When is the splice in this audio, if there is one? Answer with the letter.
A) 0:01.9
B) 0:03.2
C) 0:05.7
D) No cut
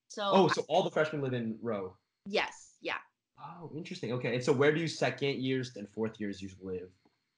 C